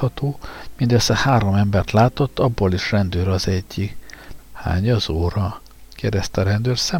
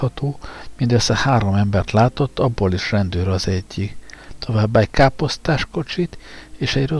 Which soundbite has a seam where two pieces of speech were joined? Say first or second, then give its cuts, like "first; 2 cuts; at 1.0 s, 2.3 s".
first; 1 cut; at 4.4 s